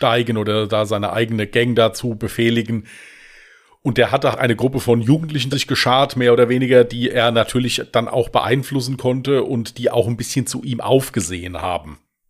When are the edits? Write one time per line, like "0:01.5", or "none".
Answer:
0:04.3
0:05.5